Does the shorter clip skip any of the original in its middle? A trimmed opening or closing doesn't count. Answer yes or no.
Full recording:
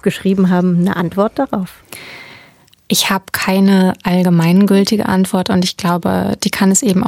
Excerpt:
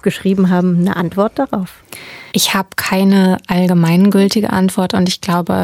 yes